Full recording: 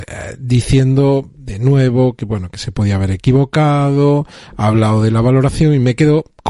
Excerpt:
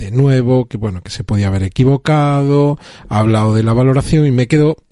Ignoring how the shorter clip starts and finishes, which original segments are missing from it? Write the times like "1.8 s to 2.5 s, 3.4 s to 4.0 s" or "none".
none